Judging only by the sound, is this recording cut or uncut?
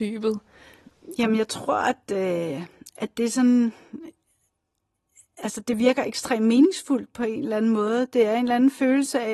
uncut